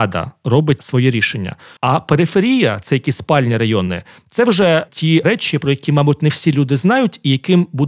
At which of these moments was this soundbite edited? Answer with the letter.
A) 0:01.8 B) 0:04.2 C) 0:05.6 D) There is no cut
A